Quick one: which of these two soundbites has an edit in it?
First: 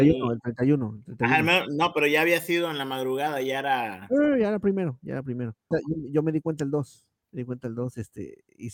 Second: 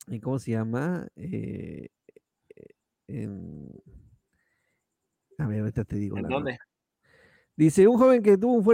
first; 2 cuts; at 5.7 s, 7.2 s

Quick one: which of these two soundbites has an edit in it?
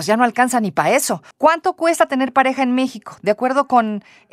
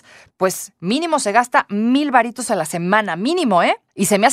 first; 1 cut; at 1.3 s

